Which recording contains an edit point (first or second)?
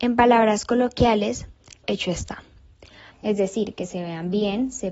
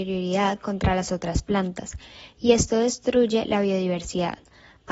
first